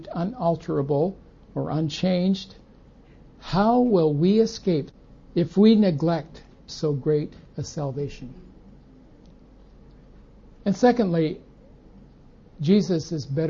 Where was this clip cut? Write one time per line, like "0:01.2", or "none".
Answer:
none